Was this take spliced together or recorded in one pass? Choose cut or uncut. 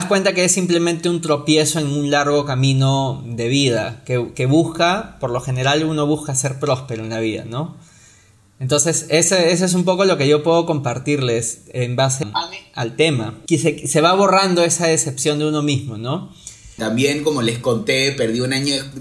cut